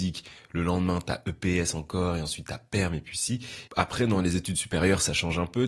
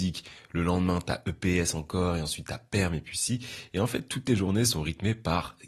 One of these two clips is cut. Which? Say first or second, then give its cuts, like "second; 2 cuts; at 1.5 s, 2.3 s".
first; 1 cut; at 3.7 s